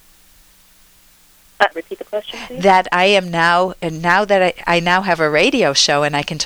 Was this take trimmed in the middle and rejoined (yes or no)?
yes